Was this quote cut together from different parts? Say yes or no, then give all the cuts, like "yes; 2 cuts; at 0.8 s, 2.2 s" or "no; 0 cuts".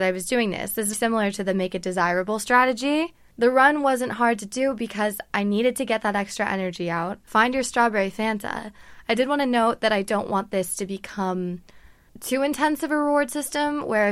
yes; 2 cuts; at 0.9 s, 7.3 s